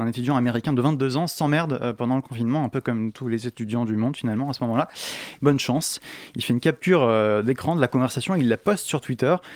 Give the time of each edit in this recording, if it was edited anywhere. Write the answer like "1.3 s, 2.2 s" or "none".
5.3 s